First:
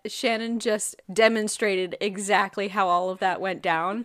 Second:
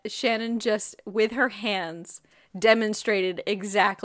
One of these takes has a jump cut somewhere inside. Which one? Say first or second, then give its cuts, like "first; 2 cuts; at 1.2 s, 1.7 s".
first; 1 cut; at 1.0 s